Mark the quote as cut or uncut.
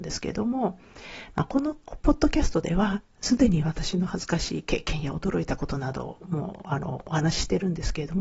uncut